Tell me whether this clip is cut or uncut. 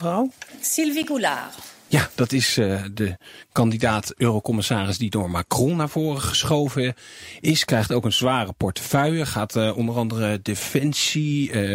uncut